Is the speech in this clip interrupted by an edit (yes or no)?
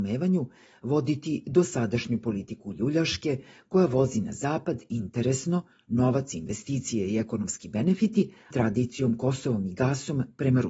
yes